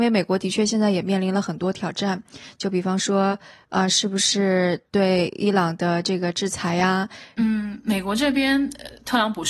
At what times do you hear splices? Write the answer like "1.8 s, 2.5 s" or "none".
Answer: 4.9 s, 7.4 s